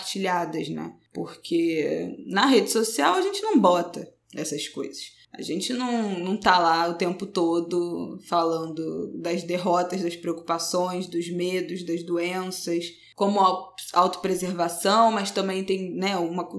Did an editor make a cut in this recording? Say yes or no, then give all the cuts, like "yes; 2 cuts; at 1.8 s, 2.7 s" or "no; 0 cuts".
no; 0 cuts